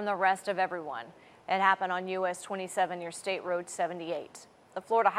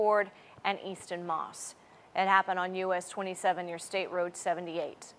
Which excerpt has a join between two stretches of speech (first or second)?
first